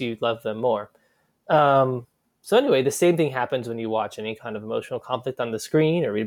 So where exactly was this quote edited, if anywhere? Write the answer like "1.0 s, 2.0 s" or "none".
none